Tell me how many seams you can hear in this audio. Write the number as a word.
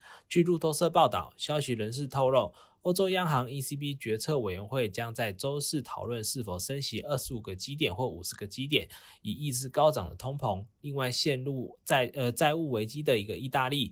zero